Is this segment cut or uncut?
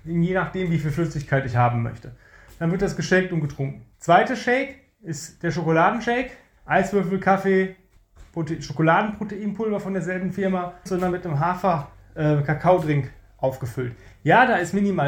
cut